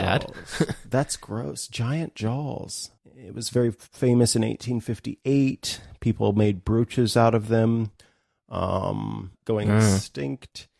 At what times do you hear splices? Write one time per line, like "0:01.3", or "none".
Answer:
0:03.0
0:09.3